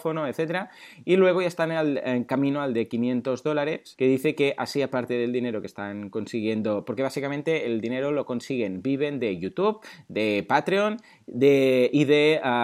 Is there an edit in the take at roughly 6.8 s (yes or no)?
no